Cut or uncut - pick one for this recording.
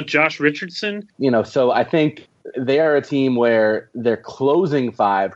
cut